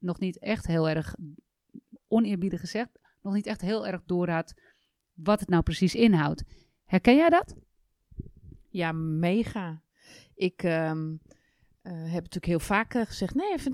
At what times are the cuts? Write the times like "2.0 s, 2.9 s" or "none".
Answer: 2.0 s

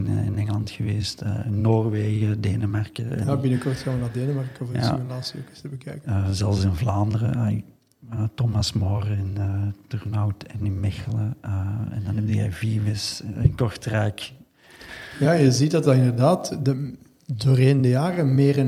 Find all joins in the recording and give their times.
6.0 s

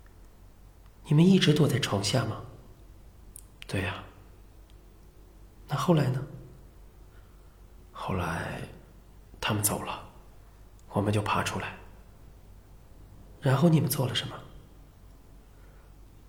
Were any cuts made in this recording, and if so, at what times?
none

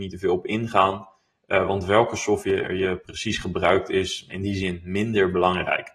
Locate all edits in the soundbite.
4.3 s

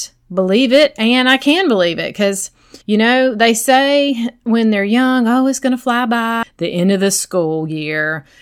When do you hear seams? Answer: 2.8 s, 6.4 s

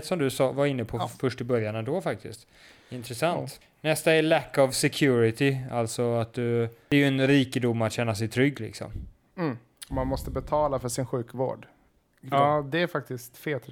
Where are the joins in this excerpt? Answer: 3.6 s, 12.3 s

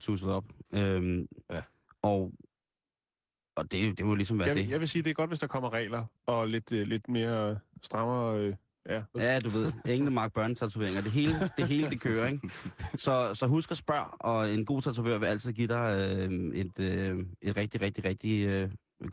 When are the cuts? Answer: 9.1 s

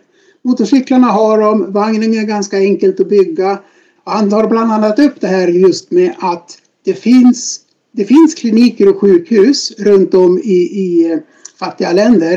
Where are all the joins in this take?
4.0 s

